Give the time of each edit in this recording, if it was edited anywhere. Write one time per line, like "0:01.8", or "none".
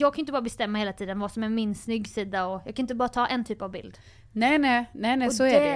none